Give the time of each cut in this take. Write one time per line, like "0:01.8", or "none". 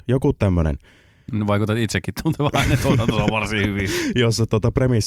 none